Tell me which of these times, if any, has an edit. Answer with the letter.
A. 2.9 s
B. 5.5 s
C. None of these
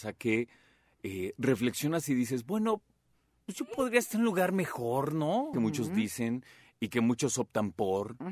B